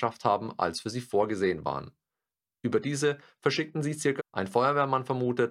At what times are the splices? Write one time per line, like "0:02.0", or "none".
0:02.5
0:04.2